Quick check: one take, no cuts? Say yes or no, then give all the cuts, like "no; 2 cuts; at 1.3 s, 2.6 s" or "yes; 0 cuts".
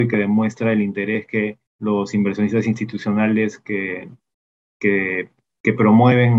no; 1 cut; at 1.7 s